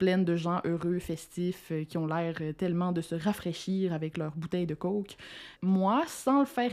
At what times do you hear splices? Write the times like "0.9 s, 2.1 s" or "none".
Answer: 5.6 s